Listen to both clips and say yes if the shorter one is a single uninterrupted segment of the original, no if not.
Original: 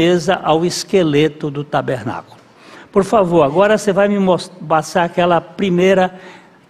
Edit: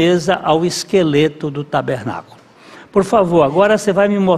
yes